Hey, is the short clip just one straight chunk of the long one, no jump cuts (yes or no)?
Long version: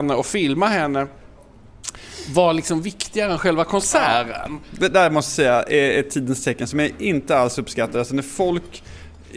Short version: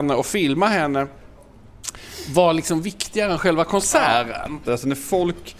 no